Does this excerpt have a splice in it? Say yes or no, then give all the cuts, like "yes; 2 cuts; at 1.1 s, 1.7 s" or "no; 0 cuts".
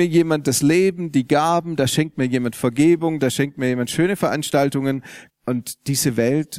yes; 2 cuts; at 3.2 s, 5.3 s